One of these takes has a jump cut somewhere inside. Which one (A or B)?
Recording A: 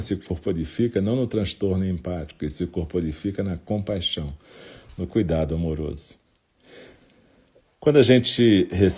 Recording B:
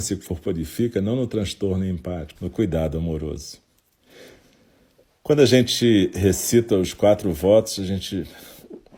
B